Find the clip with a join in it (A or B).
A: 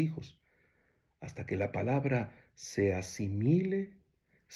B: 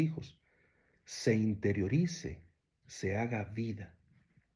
B